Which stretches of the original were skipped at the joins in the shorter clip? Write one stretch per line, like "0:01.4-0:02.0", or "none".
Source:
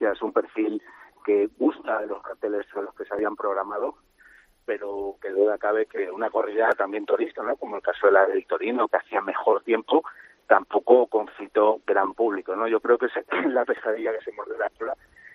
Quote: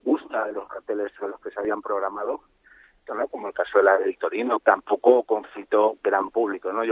0:04.6-0:07.4
0:08.9-0:10.4